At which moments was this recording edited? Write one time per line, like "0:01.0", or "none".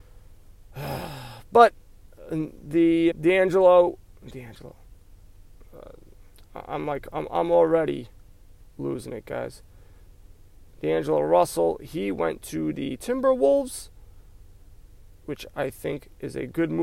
0:03.1